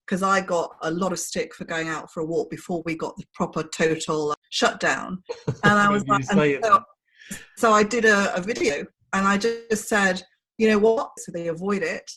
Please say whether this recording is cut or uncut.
cut